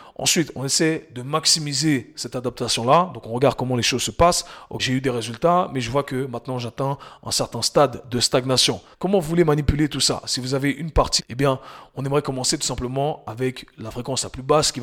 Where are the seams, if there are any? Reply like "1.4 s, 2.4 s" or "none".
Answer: 4.8 s, 8.9 s, 11.2 s